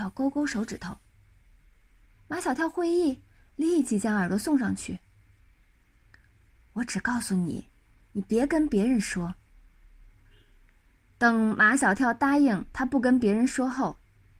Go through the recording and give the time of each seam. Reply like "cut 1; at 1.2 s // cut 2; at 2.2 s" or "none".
none